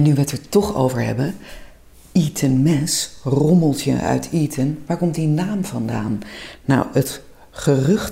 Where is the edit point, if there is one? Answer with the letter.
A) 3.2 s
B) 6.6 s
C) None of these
C